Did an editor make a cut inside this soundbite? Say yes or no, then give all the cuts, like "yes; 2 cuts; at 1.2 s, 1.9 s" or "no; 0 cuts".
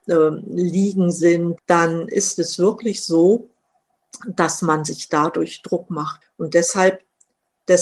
yes; 2 cuts; at 1.6 s, 6.2 s